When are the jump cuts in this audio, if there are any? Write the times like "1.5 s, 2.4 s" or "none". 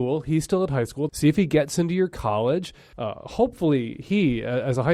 1.1 s, 2.9 s